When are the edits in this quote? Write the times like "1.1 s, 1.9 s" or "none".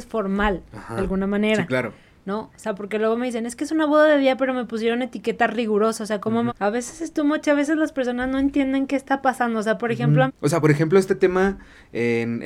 6.5 s, 10.3 s